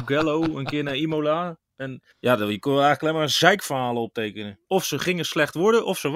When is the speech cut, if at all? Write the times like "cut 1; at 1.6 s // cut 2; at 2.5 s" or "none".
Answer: cut 1; at 2.1 s // cut 2; at 4.6 s